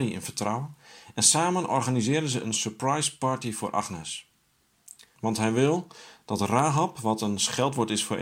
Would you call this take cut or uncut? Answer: cut